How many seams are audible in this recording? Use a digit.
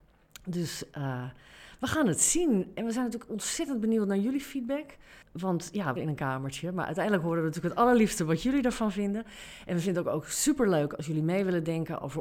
1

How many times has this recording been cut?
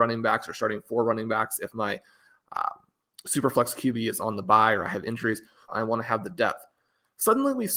1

